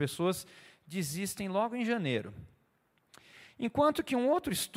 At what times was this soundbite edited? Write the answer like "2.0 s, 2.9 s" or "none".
none